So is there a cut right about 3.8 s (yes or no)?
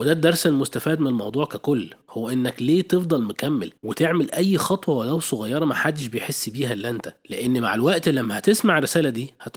yes